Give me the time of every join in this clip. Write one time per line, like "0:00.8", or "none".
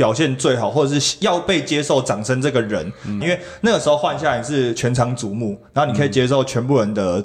0:03.2